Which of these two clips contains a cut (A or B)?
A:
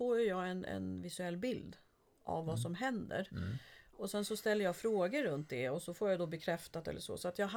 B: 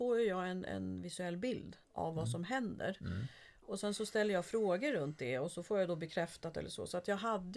B